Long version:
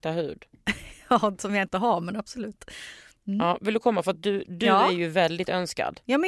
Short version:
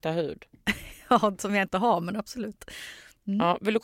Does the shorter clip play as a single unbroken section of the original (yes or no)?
yes